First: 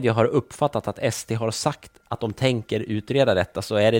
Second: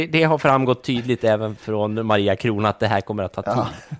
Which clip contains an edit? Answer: second; 1 cut; at 1.6 s

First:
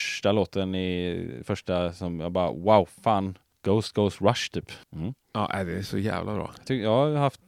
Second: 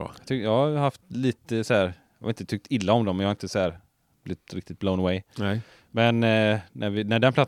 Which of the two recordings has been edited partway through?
first; 1 cut; at 4.8 s

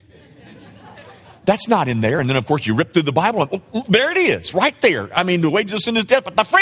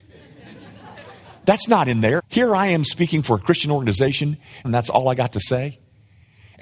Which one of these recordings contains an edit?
second; 2 cuts; at 2.2 s, 4.6 s

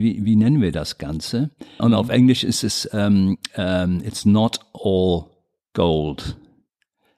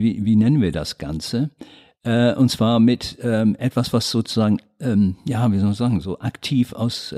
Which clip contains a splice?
first; 1 cut; at 1.8 s

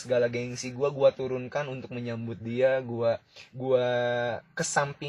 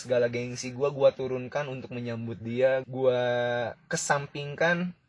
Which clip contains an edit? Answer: second; 1 cut; at 2.8 s

